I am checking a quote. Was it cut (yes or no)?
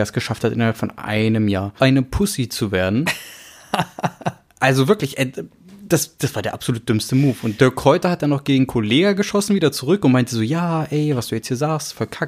yes